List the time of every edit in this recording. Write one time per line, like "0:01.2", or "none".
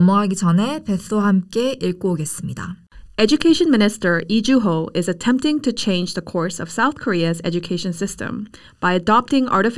none